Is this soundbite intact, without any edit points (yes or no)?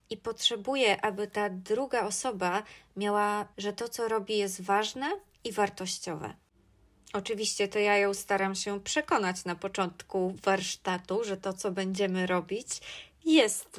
no